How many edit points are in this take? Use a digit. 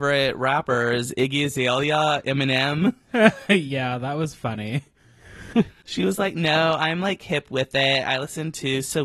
0